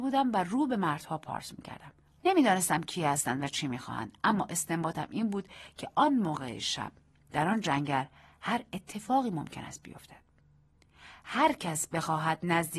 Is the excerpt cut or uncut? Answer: cut